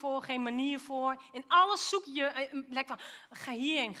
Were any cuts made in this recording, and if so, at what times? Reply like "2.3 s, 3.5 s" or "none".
2.0 s